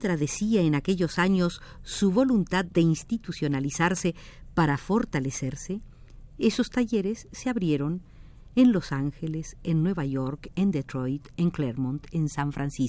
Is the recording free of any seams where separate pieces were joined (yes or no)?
yes